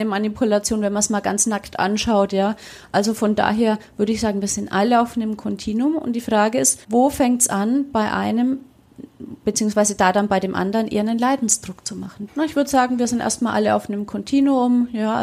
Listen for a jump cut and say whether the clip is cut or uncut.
cut